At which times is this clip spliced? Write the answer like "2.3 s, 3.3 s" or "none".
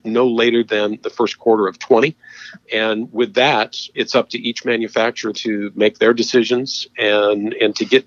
2.6 s, 3.9 s, 5.3 s